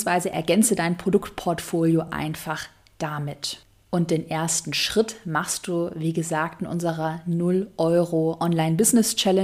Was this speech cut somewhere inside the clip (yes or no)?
no